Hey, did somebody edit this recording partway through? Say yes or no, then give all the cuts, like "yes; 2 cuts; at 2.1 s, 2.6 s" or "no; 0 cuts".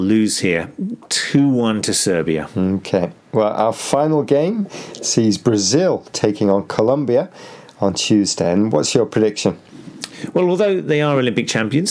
no; 0 cuts